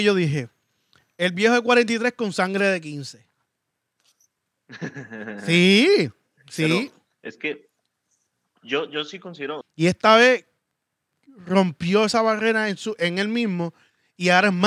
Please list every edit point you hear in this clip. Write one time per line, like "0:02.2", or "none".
0:09.6